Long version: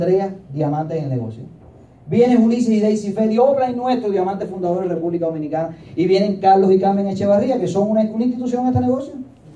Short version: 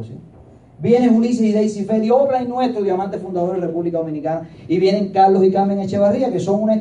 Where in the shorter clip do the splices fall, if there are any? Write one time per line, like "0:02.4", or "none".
none